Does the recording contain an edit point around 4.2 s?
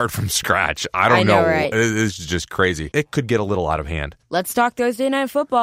yes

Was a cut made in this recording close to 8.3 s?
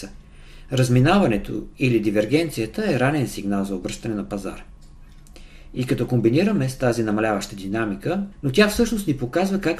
yes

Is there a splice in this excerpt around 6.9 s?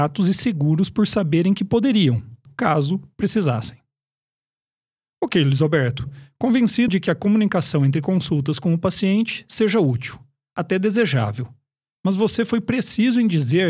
yes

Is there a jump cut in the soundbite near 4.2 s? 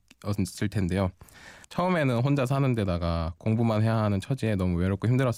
no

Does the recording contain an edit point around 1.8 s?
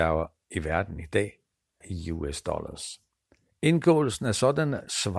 yes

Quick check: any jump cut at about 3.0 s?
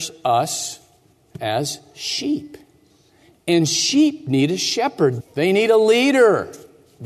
no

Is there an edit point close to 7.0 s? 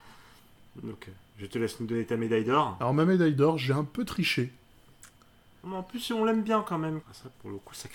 yes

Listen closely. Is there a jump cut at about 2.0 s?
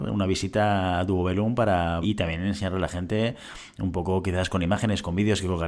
yes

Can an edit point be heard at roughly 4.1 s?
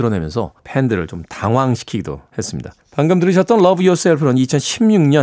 no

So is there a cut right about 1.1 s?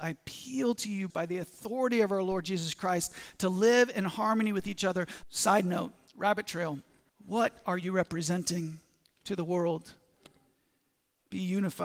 yes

